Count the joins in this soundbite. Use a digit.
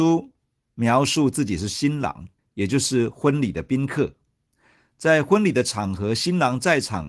1